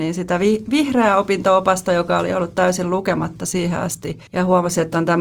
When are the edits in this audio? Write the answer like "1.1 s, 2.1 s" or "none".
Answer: none